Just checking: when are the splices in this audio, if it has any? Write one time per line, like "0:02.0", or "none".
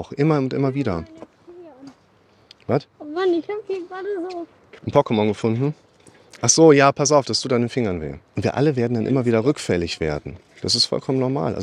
0:02.9
0:04.8
0:08.3